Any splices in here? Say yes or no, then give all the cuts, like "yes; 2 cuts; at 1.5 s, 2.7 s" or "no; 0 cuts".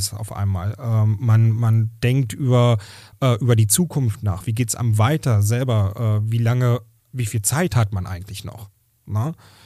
no; 0 cuts